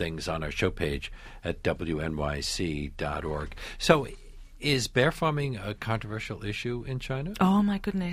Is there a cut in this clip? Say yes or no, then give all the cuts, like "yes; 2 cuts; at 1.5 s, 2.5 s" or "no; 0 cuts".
no; 0 cuts